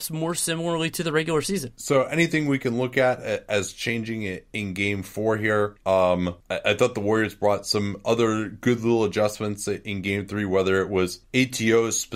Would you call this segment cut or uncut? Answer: uncut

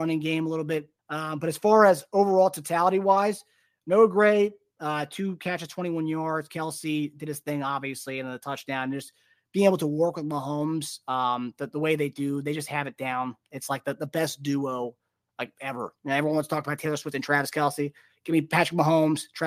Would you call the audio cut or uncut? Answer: cut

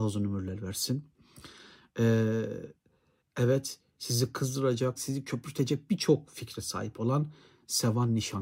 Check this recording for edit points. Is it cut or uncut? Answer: cut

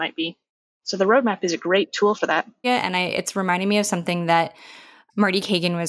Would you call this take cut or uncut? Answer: cut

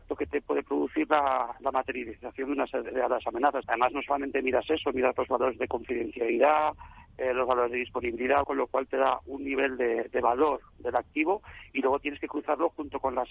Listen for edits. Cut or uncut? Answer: cut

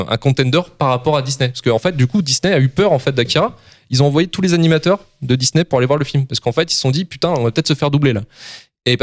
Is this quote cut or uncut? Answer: uncut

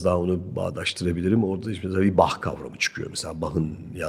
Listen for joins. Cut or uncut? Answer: uncut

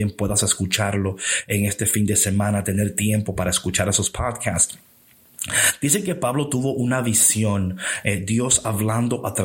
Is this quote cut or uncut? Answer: uncut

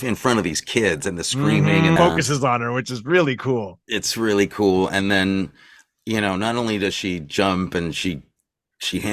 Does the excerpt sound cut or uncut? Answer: cut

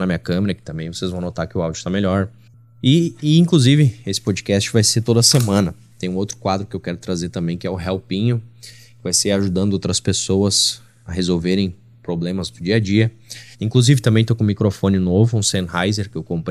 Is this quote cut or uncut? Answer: cut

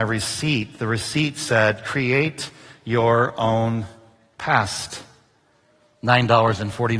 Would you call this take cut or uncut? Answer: uncut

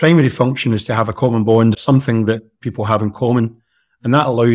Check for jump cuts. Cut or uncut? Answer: cut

